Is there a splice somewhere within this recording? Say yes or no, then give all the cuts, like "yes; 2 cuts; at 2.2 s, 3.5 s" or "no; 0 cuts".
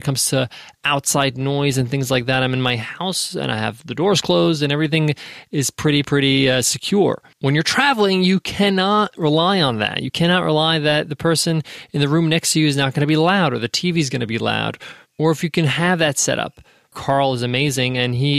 yes; 2 cuts; at 7.3 s, 16.9 s